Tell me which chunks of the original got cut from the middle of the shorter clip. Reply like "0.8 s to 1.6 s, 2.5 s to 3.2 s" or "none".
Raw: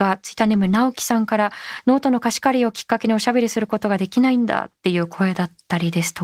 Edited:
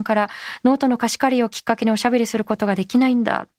none